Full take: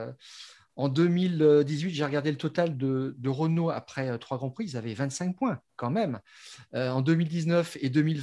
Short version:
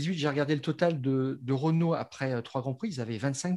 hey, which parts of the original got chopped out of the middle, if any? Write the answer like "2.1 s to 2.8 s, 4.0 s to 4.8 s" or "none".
none